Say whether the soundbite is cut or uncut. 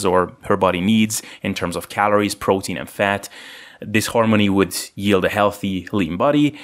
uncut